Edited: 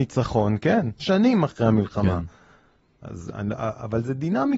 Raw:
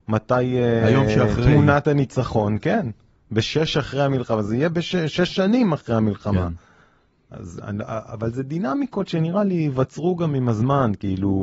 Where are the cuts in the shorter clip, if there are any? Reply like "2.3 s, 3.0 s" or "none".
1.0 s